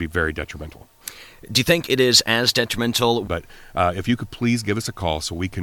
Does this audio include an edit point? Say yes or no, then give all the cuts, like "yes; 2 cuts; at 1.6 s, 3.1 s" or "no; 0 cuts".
yes; 1 cut; at 3.2 s